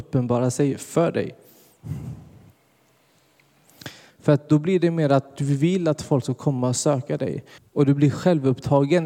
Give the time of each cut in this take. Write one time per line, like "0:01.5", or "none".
0:04.1
0:07.6